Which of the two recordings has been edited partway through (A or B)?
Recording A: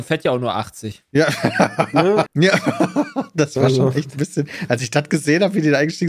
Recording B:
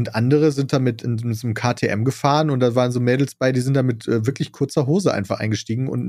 A